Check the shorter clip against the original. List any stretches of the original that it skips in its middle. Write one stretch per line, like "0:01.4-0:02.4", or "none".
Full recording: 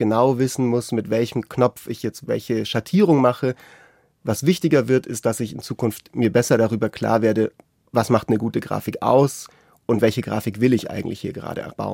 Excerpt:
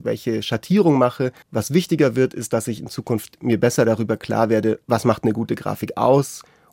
0:03.7-0:04.1
0:07.6-0:07.9